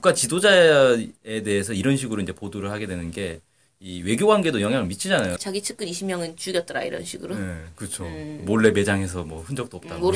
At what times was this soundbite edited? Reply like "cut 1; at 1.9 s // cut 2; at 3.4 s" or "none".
cut 1; at 5.4 s